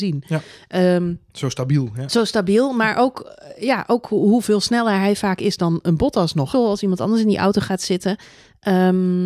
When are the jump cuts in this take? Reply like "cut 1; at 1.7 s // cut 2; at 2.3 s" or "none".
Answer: cut 1; at 6.5 s